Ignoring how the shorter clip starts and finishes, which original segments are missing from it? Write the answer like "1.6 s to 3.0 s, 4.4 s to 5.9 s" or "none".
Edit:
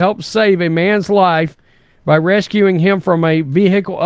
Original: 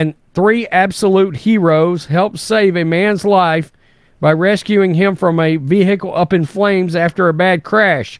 none